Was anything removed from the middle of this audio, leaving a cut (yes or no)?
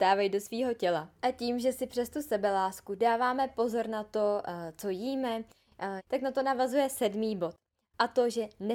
yes